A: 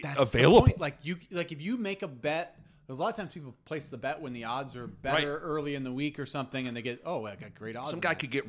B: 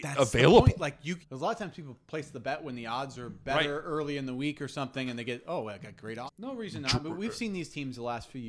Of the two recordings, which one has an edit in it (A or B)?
B